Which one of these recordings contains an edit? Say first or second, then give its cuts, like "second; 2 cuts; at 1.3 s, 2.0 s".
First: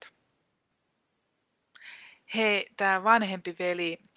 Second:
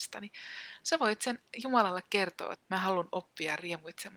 second; 1 cut; at 2.6 s